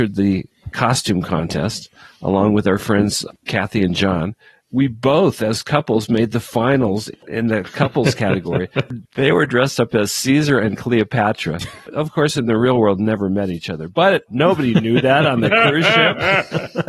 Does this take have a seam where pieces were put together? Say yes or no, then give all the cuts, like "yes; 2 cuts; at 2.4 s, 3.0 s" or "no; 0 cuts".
no; 0 cuts